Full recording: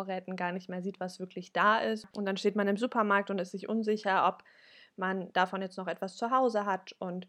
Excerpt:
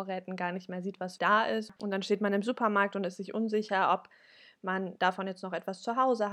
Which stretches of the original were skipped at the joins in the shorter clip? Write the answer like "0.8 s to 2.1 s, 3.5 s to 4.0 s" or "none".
1.2 s to 1.5 s